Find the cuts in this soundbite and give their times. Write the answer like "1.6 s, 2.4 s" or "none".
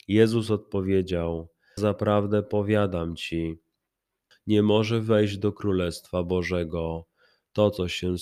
1.8 s, 4.3 s